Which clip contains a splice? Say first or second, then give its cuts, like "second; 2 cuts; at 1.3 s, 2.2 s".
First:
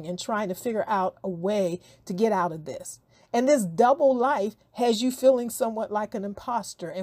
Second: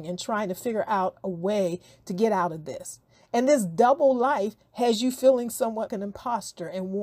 second; 1 cut; at 5.9 s